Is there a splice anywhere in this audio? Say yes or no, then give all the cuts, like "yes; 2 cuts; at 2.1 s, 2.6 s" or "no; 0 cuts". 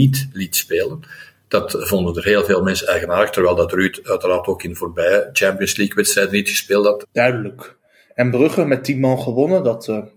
yes; 1 cut; at 7.0 s